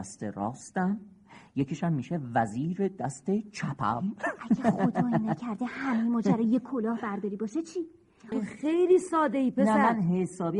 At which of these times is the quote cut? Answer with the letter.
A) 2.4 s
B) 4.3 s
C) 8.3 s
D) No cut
C